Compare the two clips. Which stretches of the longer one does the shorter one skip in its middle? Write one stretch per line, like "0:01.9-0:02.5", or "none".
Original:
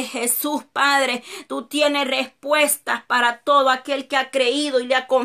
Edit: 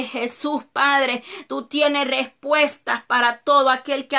none